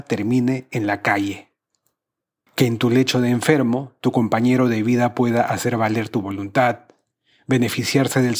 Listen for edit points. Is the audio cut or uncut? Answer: cut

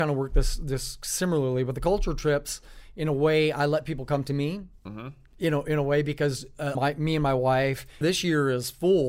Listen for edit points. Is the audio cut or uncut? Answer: cut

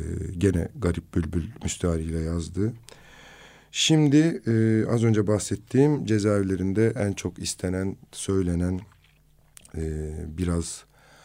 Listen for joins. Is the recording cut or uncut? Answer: uncut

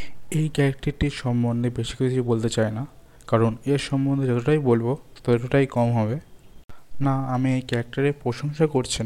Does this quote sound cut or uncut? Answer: cut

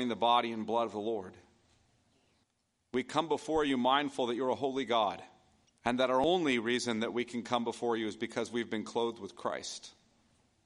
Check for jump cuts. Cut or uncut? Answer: uncut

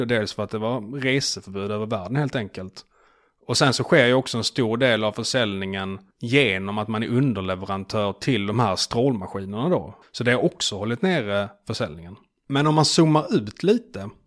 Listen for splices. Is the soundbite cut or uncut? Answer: cut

